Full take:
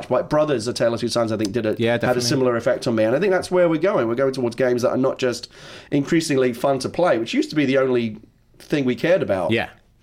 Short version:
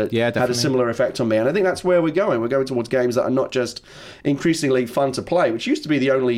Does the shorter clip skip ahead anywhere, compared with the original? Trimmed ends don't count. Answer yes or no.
no